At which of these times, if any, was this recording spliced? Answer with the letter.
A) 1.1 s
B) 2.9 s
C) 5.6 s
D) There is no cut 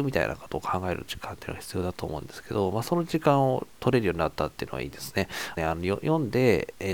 C